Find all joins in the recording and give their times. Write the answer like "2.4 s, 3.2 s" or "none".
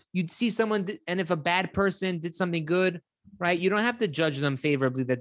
none